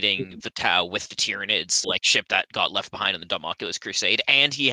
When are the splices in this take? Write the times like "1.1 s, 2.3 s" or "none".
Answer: 1.8 s